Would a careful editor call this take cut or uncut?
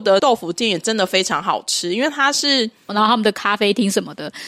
cut